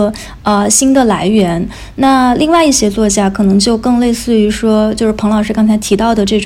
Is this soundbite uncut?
yes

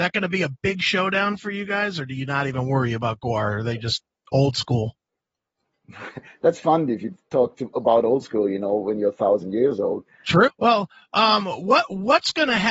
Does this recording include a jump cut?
yes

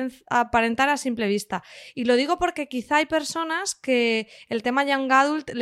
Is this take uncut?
yes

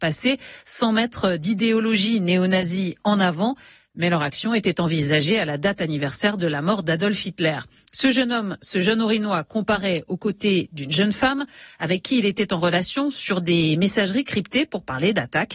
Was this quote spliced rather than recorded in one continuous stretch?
no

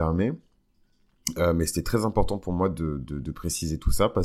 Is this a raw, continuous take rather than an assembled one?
yes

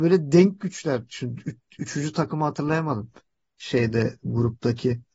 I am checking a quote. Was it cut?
no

